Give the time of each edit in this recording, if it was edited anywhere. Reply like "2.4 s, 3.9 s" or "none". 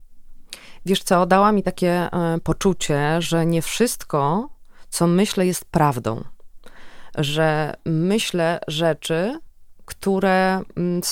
none